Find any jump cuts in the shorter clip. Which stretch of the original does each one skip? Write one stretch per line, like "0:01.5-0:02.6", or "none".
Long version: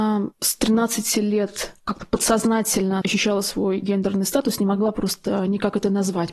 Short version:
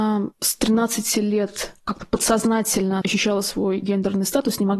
none